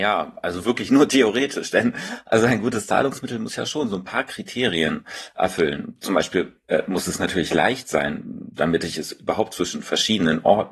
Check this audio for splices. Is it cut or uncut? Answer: uncut